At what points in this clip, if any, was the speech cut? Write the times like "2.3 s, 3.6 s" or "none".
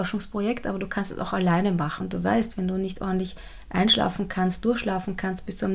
2.0 s